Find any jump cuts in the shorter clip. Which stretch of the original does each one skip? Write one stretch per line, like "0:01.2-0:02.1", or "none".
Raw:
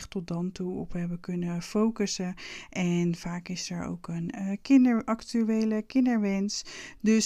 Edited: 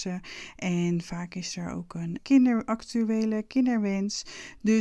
0:04.3-0:04.6